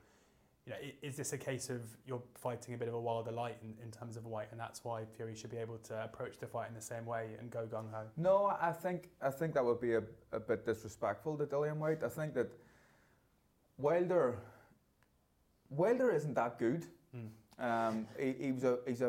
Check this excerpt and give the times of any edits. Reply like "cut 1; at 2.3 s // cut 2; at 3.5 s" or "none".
none